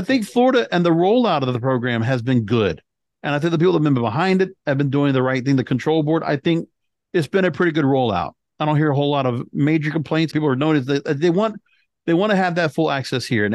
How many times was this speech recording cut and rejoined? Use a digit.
1